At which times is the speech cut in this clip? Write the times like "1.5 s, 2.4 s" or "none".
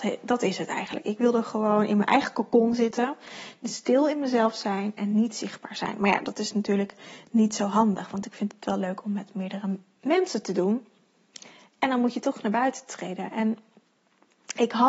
none